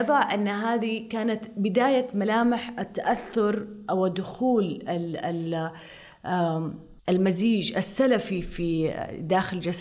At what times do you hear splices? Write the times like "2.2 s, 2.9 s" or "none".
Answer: 7.0 s